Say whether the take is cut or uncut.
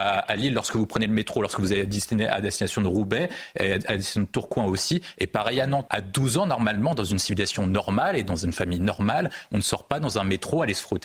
cut